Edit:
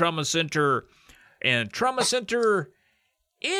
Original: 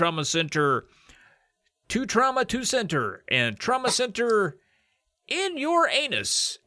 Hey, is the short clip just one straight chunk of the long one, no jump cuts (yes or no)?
no